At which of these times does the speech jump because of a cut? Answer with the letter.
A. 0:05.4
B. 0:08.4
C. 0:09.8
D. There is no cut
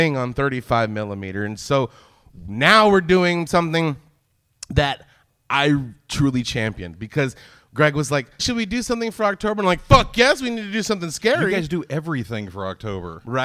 B